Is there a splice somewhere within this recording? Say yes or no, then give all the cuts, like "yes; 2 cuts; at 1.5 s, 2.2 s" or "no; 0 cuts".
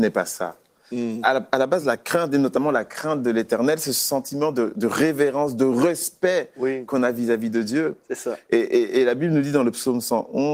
no; 0 cuts